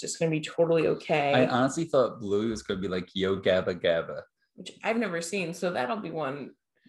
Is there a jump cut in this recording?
no; 0 cuts

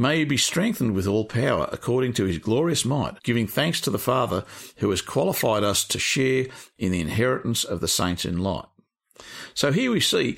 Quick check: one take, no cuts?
no; 1 cut; at 3.2 s

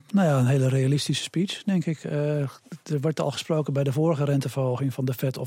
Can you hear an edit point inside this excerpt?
no; 0 cuts

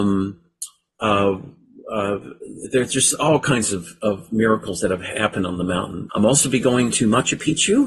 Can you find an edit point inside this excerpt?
yes; 1 cut; at 6.1 s

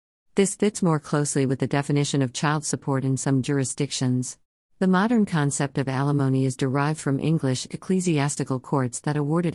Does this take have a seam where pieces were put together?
yes; 1 cut; at 4.7 s

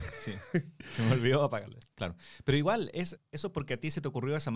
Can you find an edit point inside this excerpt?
yes; 2 cuts; at 1.9 s, 3.2 s

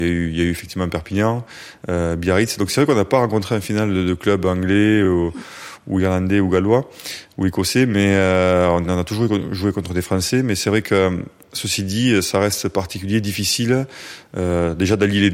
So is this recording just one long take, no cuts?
yes; 0 cuts

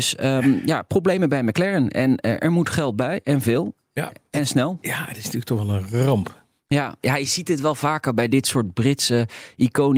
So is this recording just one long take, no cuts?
yes; 0 cuts

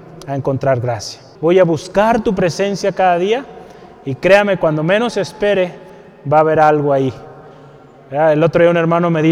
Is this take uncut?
no; 1 cut; at 1.4 s

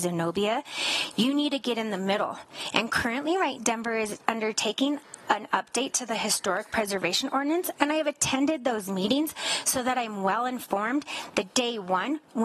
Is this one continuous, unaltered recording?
no; 1 cut; at 3.6 s

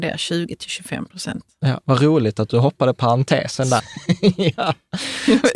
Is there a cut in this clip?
yes; 1 cut; at 3.8 s

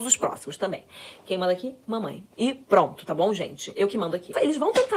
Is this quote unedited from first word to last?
yes; 0 cuts

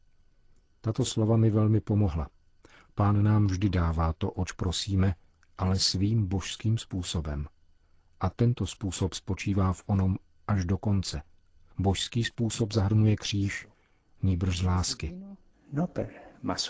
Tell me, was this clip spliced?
yes; 2 cuts; at 14.1 s, 15.5 s

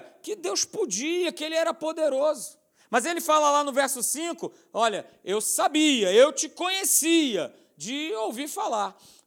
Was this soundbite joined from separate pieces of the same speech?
no; 0 cuts

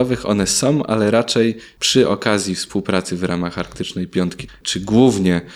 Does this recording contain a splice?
yes; 1 cut; at 4.5 s

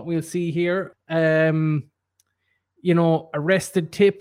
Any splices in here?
yes; 1 cut; at 0.9 s

